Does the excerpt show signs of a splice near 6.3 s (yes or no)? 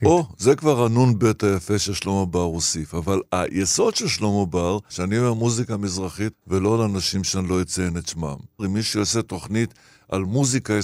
yes